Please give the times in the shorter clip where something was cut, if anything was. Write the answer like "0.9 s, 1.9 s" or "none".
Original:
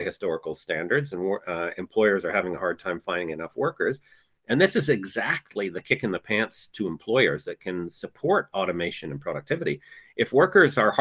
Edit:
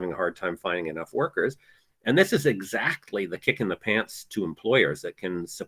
none